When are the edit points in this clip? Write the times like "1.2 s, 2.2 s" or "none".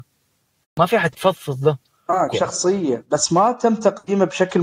2.3 s